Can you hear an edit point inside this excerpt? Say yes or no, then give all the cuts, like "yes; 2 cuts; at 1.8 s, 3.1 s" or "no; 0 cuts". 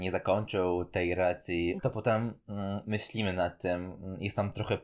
yes; 1 cut; at 1.8 s